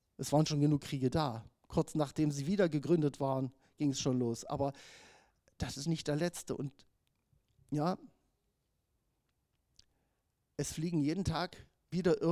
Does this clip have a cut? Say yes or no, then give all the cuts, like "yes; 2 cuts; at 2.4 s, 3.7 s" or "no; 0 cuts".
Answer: no; 0 cuts